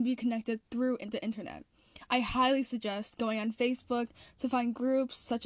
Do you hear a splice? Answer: no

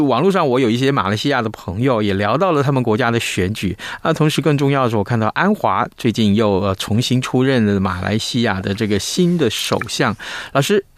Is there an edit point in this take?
no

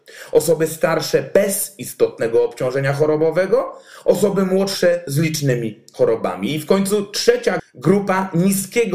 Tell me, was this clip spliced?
yes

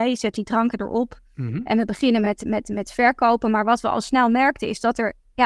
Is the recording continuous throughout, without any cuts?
yes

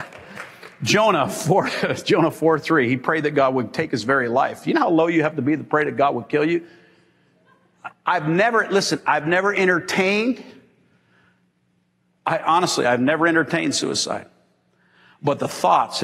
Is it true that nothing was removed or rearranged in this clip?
no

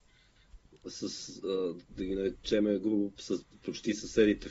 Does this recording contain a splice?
no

